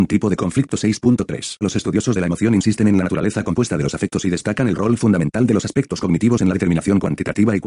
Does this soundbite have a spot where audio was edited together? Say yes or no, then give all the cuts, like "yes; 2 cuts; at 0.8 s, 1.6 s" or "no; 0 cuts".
yes; 1 cut; at 1.6 s